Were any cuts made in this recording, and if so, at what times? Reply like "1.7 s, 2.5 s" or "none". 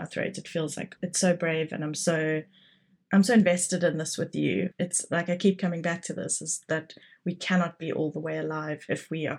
1.0 s, 4.7 s